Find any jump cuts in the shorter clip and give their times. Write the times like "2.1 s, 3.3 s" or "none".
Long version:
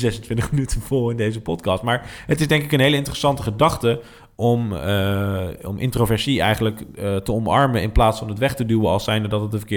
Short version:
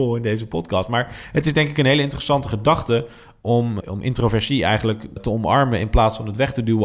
3.8 s, 5.2 s